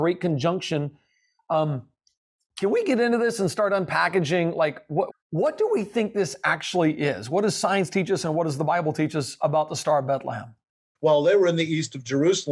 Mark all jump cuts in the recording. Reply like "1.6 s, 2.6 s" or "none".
5.1 s, 11.0 s